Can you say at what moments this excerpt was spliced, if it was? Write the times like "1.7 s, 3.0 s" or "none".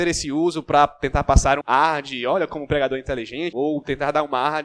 1.6 s, 3.5 s